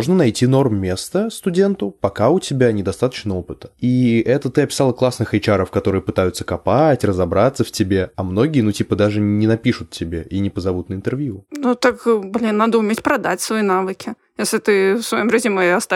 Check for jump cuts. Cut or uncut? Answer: uncut